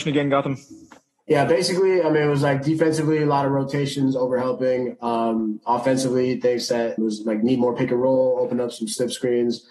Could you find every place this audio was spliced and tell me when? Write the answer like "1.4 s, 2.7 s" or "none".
7.0 s